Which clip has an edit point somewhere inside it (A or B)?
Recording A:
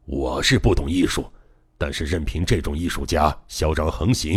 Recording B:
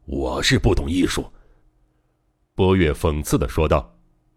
B